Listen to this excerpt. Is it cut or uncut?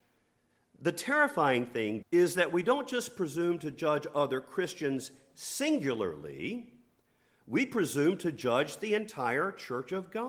cut